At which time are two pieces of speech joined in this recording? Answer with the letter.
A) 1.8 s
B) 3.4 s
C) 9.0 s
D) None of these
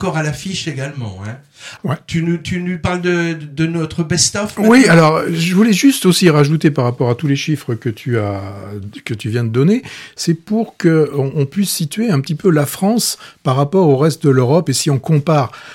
A